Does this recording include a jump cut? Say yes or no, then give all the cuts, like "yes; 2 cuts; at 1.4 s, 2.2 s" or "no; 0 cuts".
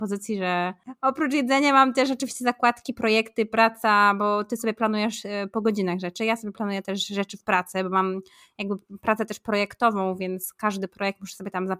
no; 0 cuts